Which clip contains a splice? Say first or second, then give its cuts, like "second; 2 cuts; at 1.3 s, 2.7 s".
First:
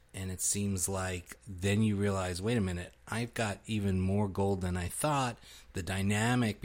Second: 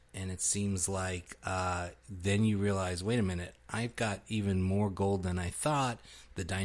first; 1 cut; at 1.4 s